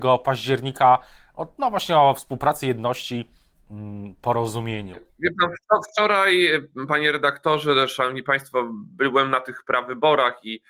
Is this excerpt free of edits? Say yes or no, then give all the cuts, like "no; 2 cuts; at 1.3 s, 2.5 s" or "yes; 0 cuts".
yes; 0 cuts